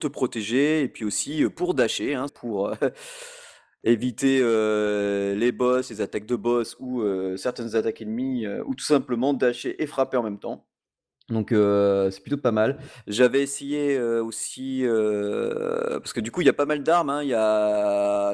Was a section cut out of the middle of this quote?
yes; 1 cut; at 2.3 s

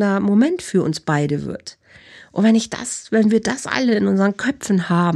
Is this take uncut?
yes; 0 cuts

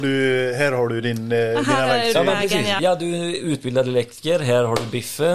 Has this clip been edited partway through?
yes; 1 cut; at 2.8 s

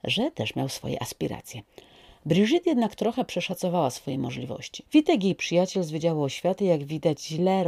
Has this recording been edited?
yes; 1 cut; at 4.9 s

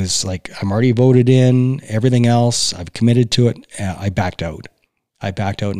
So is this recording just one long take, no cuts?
yes; 0 cuts

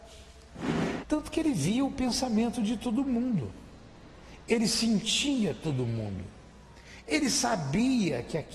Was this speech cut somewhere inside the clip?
yes; 1 cut; at 1.0 s

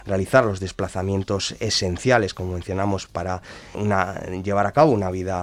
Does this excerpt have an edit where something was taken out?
yes; 1 cut; at 3.7 s

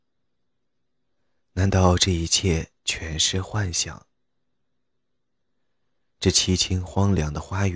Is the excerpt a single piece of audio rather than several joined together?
yes; 0 cuts

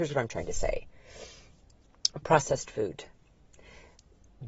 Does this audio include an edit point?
no; 0 cuts

